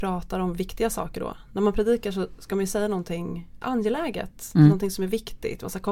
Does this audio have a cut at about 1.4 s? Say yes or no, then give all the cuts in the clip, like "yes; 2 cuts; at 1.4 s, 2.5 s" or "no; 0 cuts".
no; 1 cut; at 3.6 s